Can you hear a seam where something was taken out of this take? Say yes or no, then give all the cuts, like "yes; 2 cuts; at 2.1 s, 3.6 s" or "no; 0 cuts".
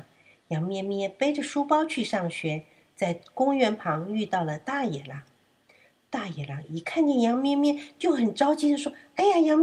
no; 0 cuts